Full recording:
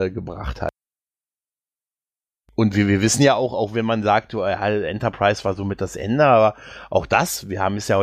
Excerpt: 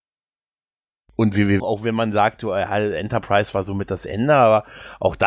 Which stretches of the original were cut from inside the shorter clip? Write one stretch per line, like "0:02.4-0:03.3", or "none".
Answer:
0:03.0-0:03.5

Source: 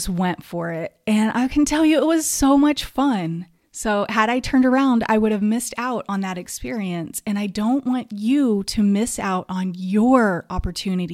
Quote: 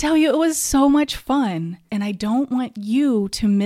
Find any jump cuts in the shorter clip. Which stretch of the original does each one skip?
0:03.6-0:07.2

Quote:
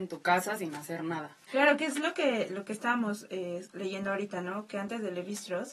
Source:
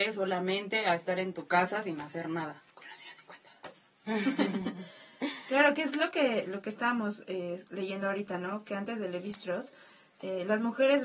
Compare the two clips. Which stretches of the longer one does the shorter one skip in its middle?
0:02.7-0:05.4

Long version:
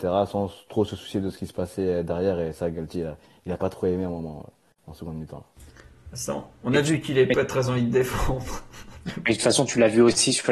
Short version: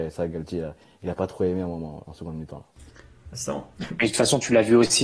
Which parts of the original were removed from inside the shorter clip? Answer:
0:04.5-0:04.8
0:06.6-0:09.0

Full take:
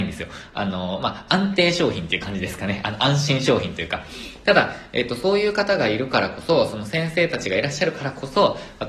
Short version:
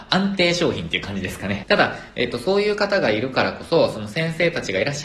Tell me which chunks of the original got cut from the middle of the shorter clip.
0:02.8-0:04.4

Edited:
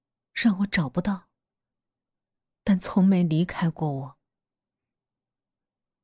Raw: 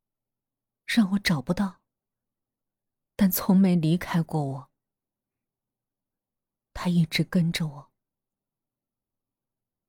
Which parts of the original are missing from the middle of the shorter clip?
none

